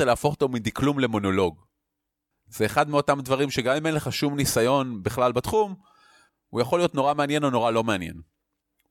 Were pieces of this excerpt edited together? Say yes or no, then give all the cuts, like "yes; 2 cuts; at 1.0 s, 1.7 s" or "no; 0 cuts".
yes; 2 cuts; at 2.3 s, 6.3 s